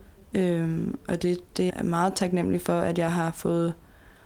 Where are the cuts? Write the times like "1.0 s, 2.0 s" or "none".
1.7 s